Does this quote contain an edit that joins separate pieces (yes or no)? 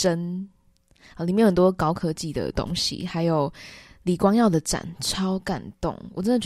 no